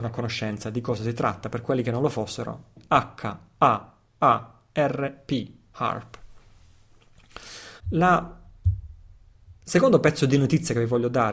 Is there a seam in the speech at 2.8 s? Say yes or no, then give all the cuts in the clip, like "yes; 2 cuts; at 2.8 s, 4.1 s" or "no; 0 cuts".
yes; 2 cuts; at 2.8 s, 7.8 s